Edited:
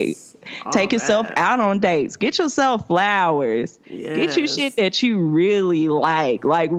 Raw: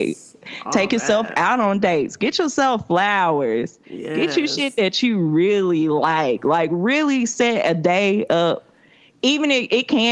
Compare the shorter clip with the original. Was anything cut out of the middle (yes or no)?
no